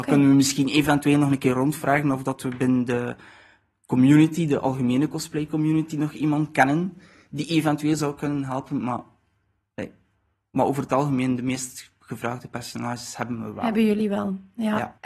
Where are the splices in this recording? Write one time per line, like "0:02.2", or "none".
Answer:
none